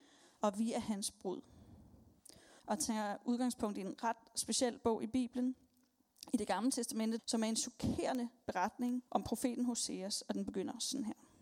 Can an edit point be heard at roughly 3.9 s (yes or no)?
no